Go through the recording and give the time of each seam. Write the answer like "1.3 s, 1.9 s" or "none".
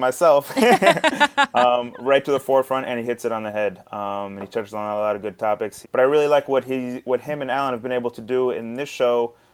3.0 s, 5.8 s